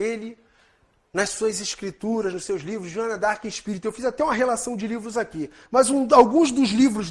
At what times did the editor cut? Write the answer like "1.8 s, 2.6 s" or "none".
none